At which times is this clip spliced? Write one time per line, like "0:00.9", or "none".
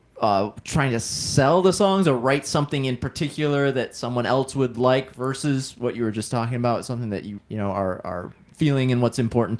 0:07.4